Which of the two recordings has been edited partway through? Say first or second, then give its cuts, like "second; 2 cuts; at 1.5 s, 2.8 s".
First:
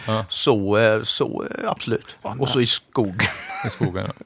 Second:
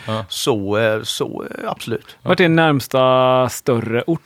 first; 1 cut; at 2.2 s